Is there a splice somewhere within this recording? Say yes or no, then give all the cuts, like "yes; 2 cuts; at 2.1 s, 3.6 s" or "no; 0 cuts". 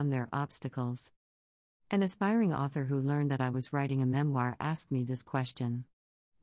no; 0 cuts